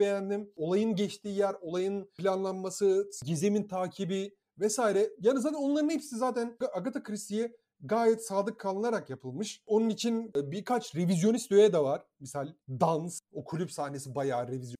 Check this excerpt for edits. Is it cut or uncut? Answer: uncut